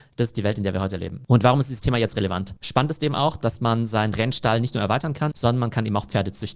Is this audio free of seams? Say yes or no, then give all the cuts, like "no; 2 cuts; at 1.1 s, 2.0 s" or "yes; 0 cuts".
no; 2 cuts; at 2.6 s, 5.3 s